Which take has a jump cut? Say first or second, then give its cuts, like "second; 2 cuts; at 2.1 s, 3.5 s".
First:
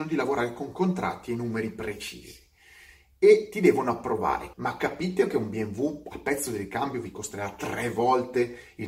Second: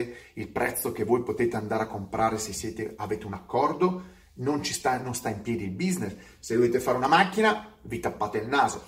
first; 1 cut; at 4.5 s